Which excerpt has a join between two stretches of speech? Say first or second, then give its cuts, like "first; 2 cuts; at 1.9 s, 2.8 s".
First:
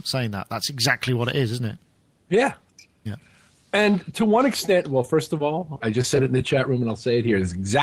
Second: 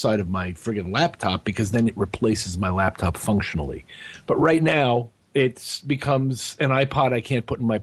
first; 1 cut; at 5.8 s